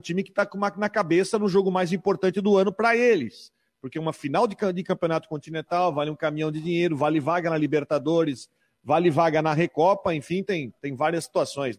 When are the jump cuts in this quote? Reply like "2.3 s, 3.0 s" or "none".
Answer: none